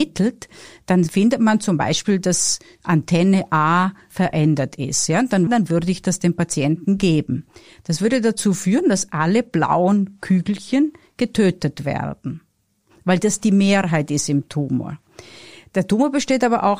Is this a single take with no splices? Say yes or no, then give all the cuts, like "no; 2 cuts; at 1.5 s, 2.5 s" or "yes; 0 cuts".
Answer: no; 1 cut; at 5.5 s